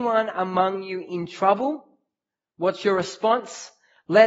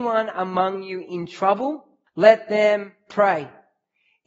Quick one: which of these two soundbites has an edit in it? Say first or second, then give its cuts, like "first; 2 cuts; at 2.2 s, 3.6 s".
second; 1 cut; at 2.1 s